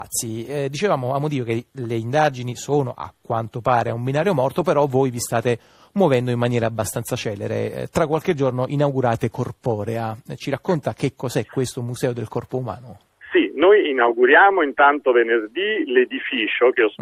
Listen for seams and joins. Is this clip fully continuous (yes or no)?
yes